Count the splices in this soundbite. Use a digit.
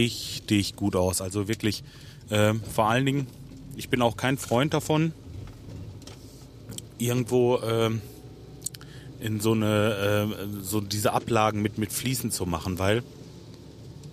0